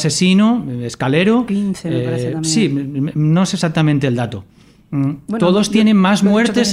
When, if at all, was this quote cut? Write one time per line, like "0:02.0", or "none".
none